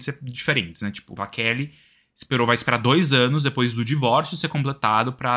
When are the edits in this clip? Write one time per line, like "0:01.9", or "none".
0:01.2